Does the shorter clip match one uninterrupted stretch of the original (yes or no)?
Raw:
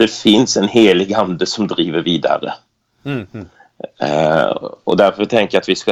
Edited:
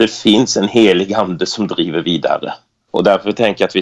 no